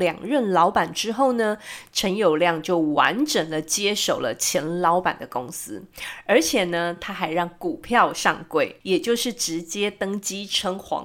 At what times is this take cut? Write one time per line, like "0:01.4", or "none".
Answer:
none